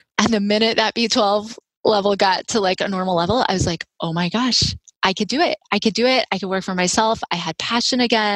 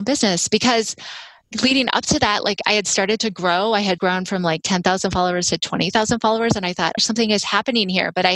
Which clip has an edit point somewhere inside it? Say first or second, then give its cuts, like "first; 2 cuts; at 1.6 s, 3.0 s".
second; 2 cuts; at 4.0 s, 7.0 s